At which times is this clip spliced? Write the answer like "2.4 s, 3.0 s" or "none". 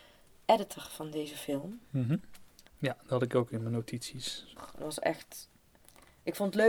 2.7 s, 4.6 s

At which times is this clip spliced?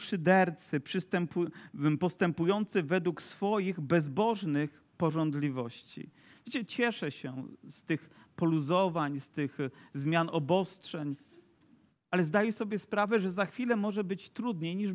6.3 s

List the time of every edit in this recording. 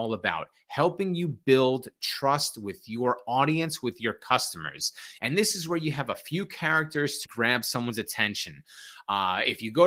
5.2 s, 7.3 s

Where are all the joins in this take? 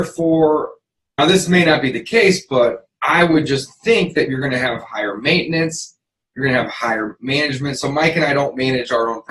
1.2 s

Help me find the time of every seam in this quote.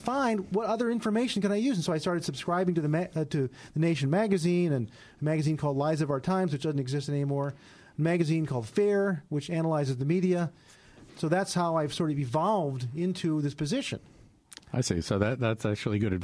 11.1 s

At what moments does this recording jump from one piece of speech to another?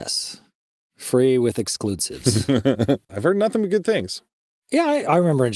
3.1 s

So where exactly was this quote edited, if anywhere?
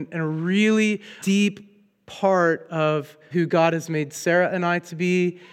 1.2 s, 3.3 s

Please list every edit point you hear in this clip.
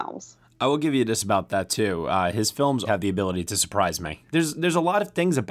2.8 s, 4.3 s

